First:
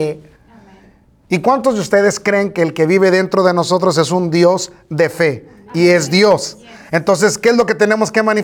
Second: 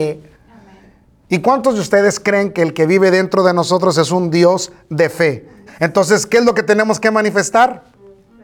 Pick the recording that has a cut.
second; 1 cut; at 5.7 s

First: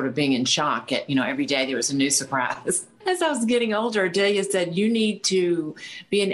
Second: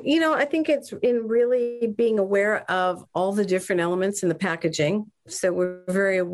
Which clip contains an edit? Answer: first; 1 cut; at 2.9 s

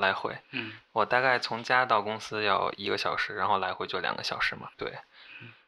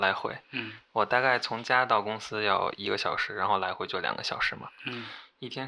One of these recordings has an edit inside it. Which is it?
first; 1 cut; at 4.7 s

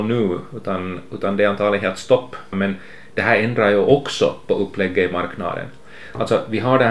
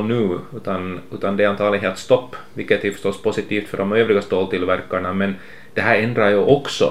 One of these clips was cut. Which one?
first; 1 cut; at 2.5 s

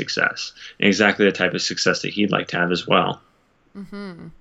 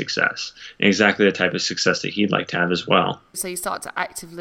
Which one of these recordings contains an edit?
second; 1 cut; at 3.3 s

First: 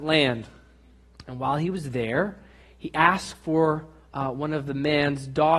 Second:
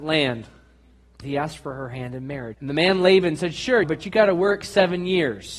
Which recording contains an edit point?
second; 3 cuts; at 1.2 s, 2.5 s, 3.8 s

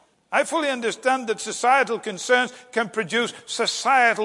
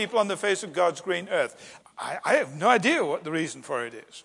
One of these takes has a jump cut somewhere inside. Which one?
second; 1 cut; at 1.8 s

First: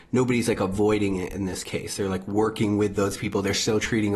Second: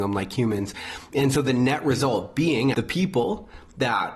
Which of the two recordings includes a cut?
second; 1 cut; at 2.7 s

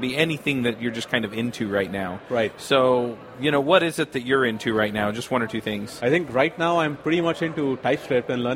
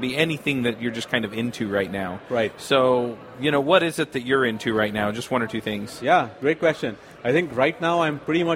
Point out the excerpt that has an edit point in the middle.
first; 1 cut; at 6.0 s

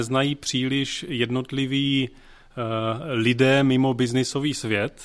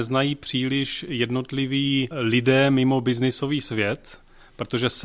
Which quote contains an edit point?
second; 1 cut; at 2.1 s

